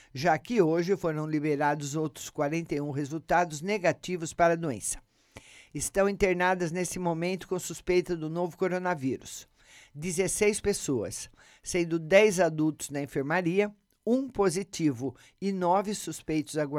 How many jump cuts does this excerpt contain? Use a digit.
0